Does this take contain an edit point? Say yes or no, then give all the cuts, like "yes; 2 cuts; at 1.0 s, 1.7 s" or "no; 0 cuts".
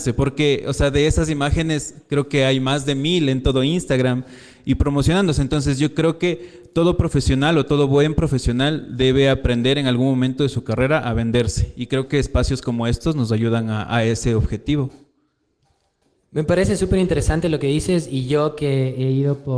no; 0 cuts